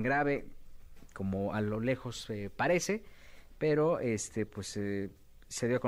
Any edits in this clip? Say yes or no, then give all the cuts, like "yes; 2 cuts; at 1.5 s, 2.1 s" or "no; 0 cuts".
no; 0 cuts